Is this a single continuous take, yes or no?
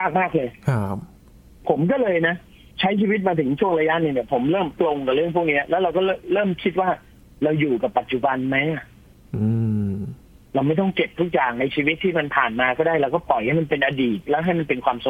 yes